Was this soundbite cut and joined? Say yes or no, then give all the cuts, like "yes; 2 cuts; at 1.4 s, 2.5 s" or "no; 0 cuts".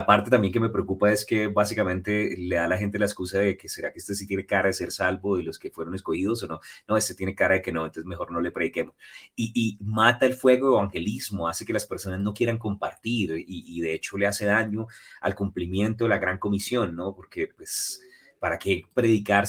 no; 0 cuts